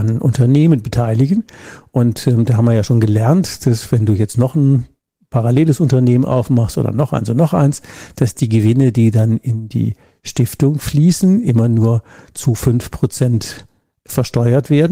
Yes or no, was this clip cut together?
no